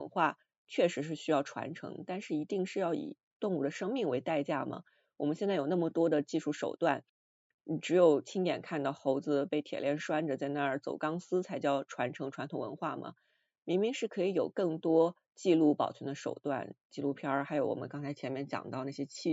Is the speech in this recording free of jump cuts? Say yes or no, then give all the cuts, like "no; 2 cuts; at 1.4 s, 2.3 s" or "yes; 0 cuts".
yes; 0 cuts